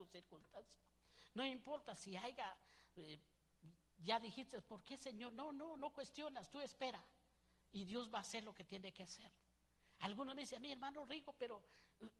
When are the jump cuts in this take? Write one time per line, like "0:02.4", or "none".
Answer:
none